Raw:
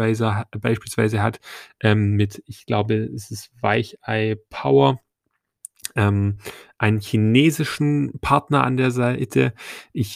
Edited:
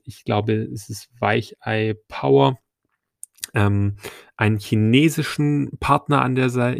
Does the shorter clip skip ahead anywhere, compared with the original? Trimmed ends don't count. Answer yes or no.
no